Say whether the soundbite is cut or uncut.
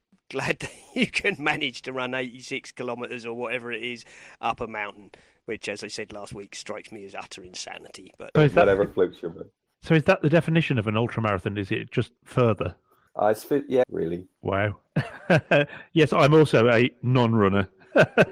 cut